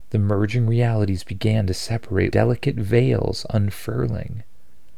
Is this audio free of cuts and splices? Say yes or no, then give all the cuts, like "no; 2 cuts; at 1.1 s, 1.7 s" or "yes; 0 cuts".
no; 1 cut; at 2.3 s